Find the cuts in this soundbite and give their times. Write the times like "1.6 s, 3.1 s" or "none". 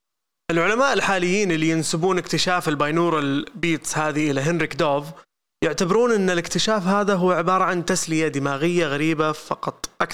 none